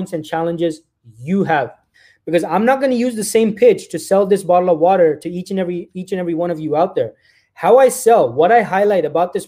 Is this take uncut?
yes; 0 cuts

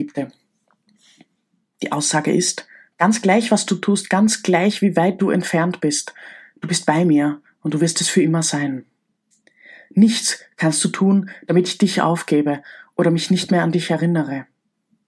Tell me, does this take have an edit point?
no; 0 cuts

